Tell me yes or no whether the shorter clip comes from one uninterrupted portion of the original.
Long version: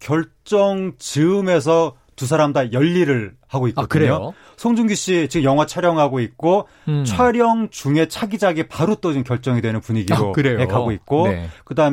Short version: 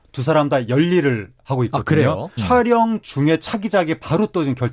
no